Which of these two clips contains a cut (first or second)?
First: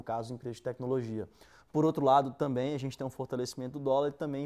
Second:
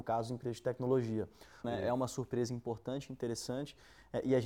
second